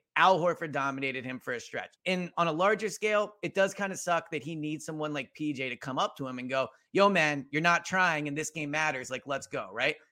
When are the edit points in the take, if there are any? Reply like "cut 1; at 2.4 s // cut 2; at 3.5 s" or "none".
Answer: cut 1; at 2.0 s